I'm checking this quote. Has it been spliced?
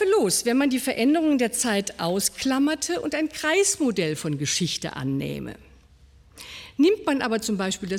no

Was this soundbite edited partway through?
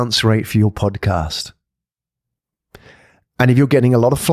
no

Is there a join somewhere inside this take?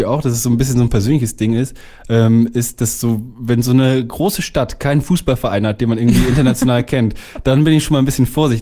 no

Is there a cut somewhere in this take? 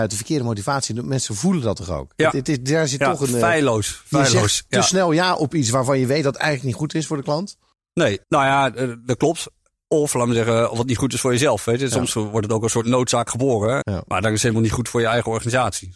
yes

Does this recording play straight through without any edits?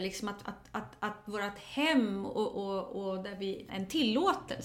no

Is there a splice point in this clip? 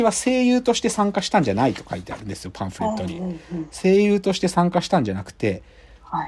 no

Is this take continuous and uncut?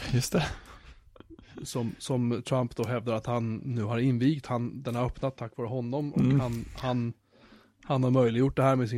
yes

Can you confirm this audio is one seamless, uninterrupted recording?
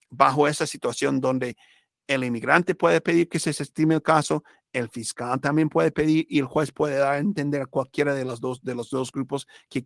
yes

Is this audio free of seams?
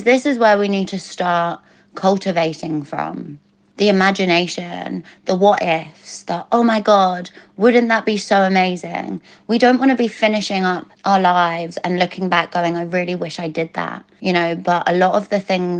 yes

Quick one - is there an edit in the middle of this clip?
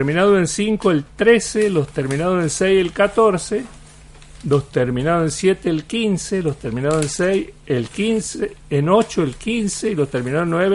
no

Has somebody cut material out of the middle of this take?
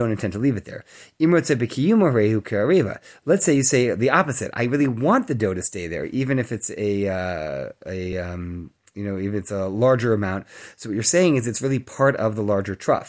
no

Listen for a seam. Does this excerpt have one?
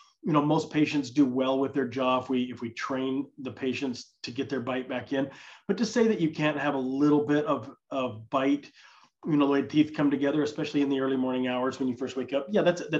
no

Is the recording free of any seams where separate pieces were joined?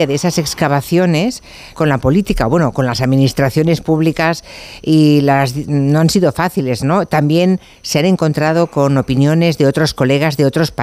no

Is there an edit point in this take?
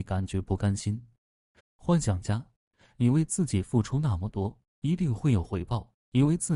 yes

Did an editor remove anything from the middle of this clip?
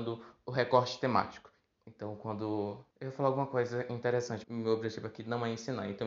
yes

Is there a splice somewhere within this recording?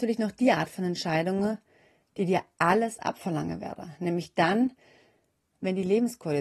no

